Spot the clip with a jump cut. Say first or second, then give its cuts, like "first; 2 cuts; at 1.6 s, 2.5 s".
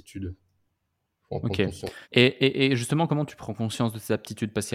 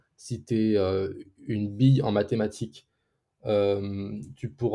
first; 1 cut; at 2.0 s